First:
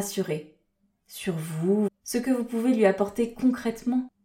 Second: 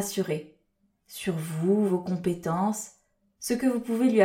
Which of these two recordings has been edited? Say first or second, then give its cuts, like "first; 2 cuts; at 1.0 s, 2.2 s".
first; 1 cut; at 1.9 s